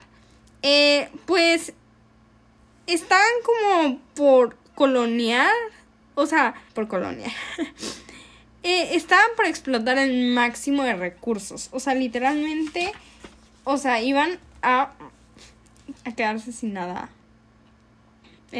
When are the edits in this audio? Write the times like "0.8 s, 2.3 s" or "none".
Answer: 6.7 s, 16.0 s